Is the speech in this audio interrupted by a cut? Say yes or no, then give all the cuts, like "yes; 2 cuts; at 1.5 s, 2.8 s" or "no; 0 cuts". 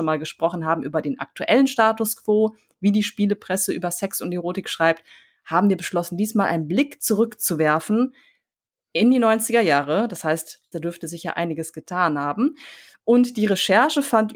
yes; 1 cut; at 10.7 s